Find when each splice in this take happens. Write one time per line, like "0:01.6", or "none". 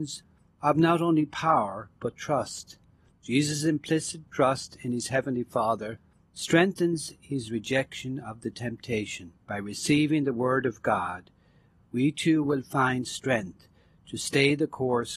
0:03.1
0:09.4